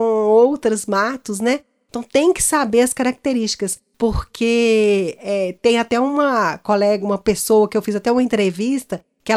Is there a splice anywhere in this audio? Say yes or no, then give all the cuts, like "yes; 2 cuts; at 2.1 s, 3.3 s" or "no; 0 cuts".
no; 0 cuts